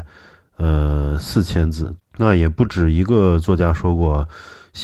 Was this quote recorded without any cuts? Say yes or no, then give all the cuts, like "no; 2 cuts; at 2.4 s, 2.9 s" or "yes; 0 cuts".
no; 1 cut; at 2.0 s